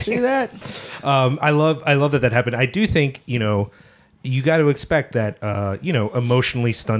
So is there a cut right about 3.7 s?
no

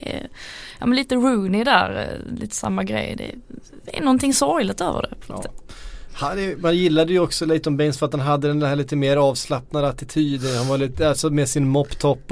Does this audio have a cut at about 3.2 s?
no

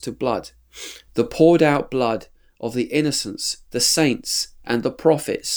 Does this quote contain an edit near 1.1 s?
yes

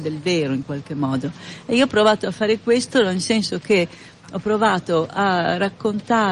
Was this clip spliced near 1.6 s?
no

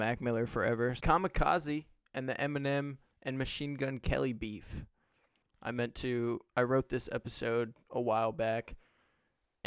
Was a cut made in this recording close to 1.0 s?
yes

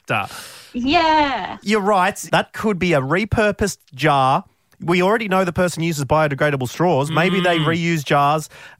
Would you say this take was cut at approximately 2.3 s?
yes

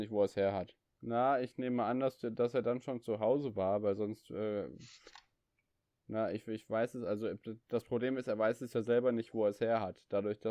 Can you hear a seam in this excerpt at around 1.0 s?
yes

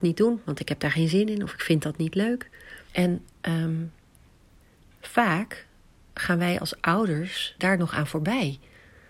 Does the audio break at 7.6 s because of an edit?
yes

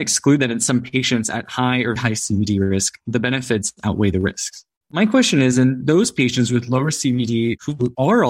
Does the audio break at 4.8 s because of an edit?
yes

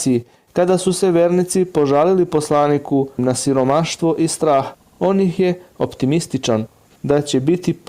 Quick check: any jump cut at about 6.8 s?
yes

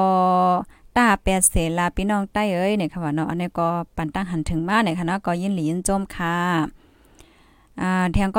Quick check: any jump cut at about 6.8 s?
no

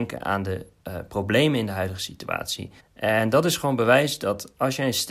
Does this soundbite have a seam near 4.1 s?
no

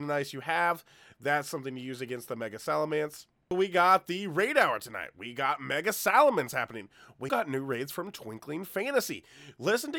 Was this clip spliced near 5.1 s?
no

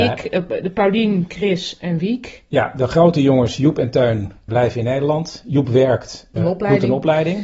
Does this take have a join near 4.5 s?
yes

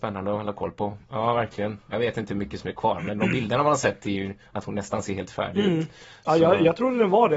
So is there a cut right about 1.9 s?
yes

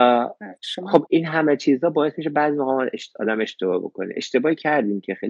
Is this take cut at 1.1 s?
yes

